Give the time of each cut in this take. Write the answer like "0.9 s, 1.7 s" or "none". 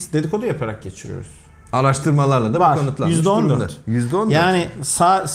none